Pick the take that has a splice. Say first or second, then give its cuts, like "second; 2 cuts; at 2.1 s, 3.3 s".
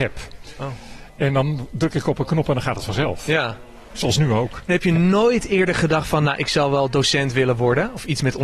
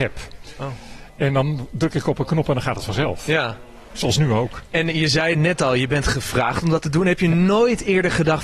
first; 1 cut; at 4.7 s